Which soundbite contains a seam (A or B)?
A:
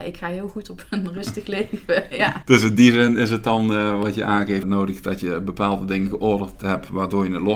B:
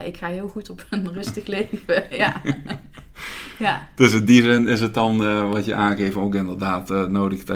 A